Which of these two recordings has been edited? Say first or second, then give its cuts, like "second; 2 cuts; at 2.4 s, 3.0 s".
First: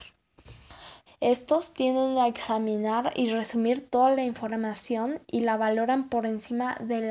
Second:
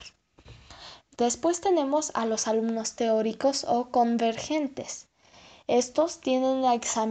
first; 1 cut; at 1.1 s